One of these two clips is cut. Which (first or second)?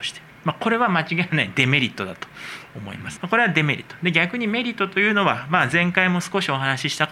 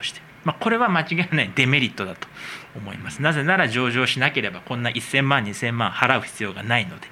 first